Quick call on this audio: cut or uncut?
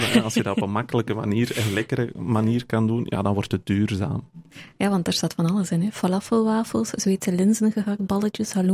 uncut